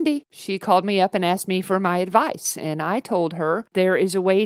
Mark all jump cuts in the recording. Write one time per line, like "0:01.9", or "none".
none